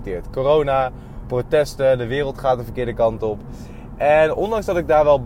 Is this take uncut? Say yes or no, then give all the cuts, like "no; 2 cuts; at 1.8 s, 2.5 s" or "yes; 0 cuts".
yes; 0 cuts